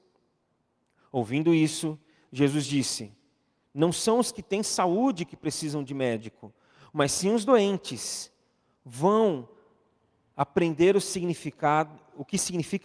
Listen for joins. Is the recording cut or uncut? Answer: uncut